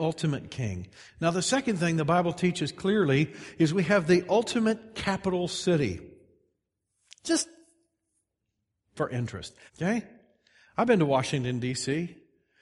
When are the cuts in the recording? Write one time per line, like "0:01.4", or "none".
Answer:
0:09.7